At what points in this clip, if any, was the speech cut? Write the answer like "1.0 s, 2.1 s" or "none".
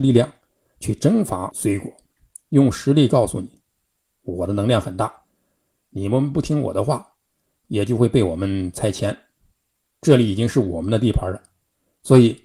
none